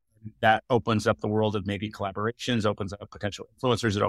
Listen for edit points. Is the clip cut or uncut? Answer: uncut